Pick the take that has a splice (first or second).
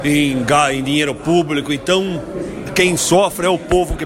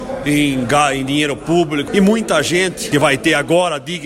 second